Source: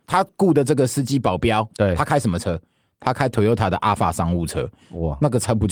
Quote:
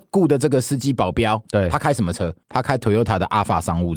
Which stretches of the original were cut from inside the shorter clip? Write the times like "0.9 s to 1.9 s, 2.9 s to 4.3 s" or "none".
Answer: 2.7 s to 2.9 s